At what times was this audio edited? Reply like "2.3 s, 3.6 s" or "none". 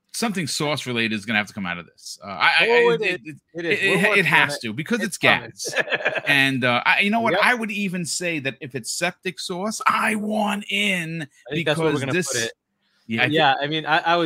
13.2 s